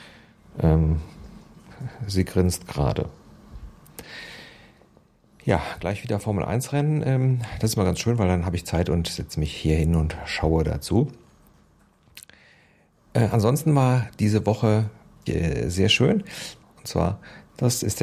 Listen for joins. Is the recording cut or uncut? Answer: cut